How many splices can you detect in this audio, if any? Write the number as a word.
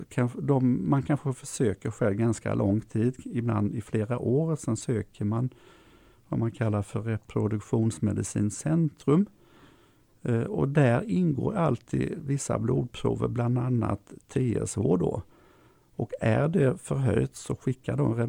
zero